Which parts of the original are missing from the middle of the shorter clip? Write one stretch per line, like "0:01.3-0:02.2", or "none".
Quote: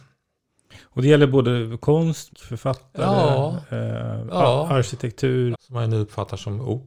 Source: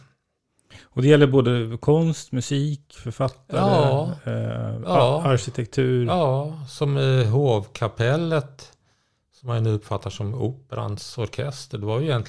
0:02.3-0:02.8
0:06.1-0:09.3